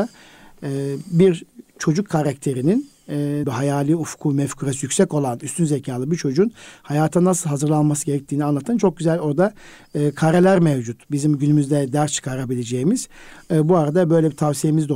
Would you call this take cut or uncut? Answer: cut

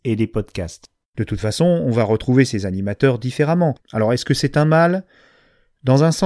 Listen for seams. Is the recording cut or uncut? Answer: cut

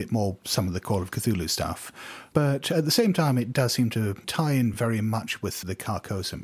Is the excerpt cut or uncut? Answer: uncut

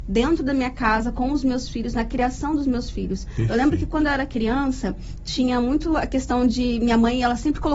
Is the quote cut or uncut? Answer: uncut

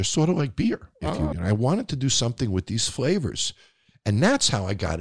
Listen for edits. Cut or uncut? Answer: cut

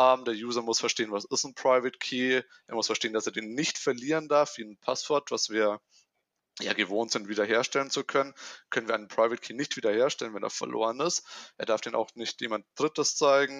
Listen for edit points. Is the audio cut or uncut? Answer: uncut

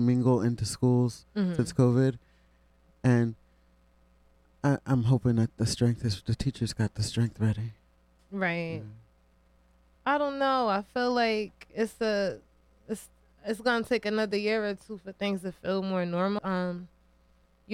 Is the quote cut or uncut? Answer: cut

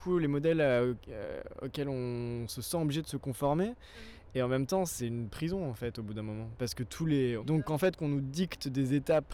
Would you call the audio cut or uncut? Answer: cut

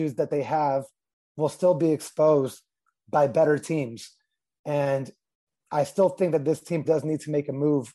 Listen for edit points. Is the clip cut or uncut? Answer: cut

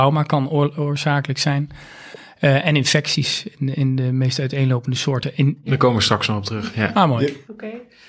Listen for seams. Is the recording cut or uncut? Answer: uncut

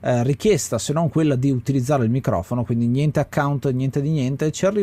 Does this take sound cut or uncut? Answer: uncut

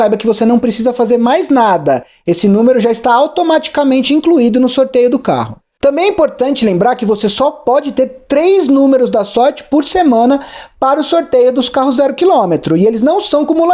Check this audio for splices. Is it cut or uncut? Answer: uncut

